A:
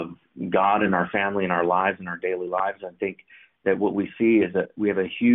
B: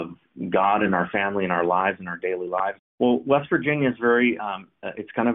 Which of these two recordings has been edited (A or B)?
B